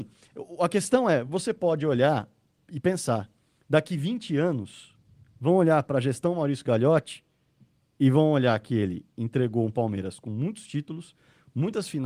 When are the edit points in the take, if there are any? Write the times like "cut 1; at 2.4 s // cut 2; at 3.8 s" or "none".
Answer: none